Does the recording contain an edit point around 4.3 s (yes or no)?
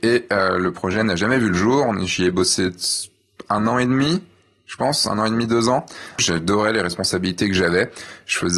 no